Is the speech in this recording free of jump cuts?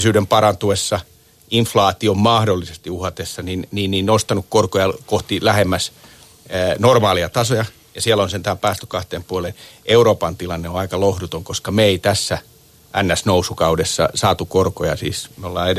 yes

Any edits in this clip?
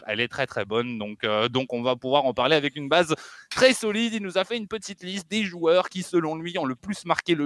no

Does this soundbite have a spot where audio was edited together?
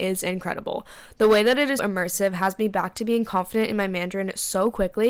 yes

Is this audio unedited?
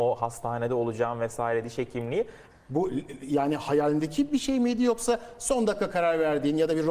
no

